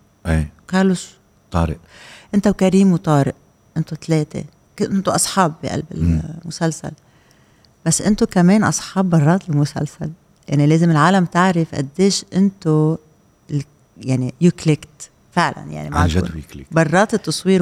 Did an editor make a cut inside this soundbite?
no; 0 cuts

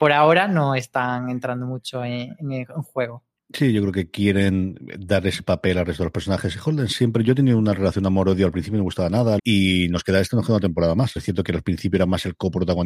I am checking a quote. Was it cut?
yes; 2 cuts; at 9.4 s, 11.2 s

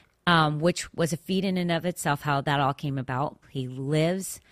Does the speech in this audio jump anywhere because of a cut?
yes; 1 cut; at 3.4 s

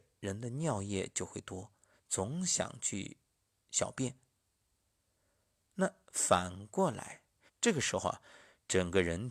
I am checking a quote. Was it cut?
yes; 1 cut; at 7.5 s

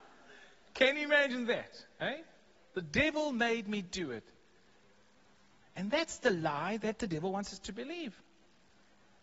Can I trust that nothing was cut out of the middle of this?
yes; 0 cuts

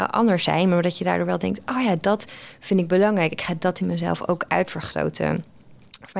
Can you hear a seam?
no; 0 cuts

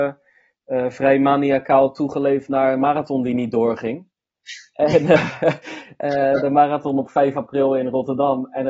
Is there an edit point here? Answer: no; 0 cuts

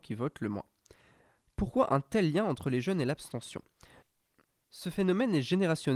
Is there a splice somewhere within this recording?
no; 0 cuts

